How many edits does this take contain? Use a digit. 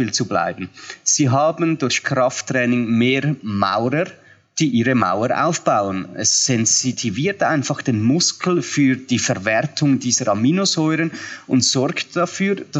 0